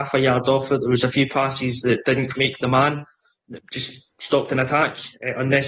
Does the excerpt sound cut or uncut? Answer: cut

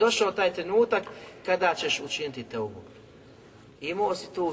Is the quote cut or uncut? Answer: uncut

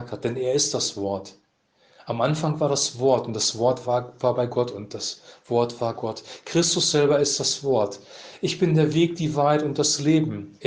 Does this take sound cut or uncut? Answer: cut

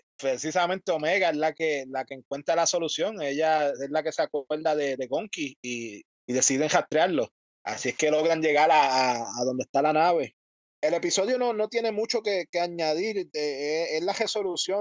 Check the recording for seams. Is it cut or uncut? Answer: uncut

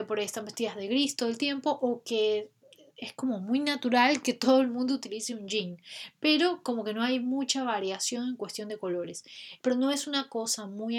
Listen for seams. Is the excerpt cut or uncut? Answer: cut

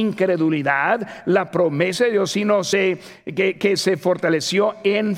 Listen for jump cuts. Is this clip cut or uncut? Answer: uncut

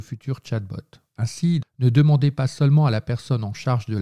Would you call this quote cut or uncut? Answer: cut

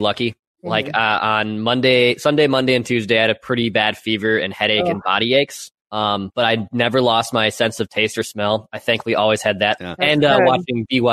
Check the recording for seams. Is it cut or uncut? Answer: cut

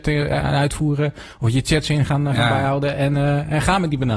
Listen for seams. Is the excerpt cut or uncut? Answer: uncut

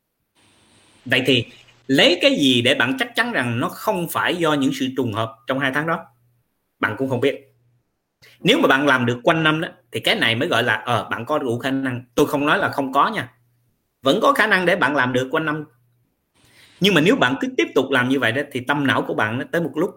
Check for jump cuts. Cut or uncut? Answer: uncut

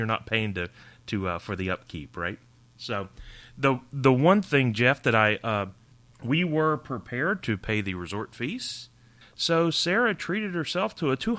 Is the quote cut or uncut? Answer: cut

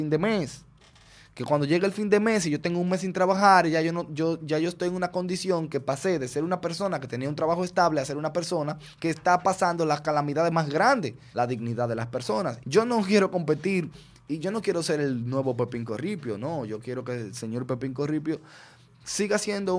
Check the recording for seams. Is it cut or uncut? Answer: cut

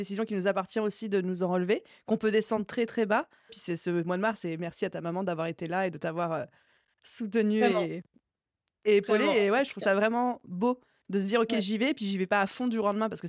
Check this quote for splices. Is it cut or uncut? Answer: cut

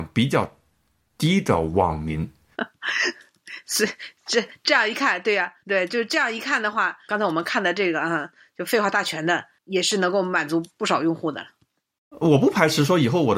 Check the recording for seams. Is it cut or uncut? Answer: cut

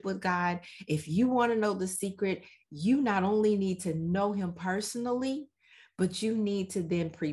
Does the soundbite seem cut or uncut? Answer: uncut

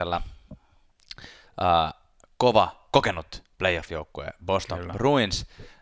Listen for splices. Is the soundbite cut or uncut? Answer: uncut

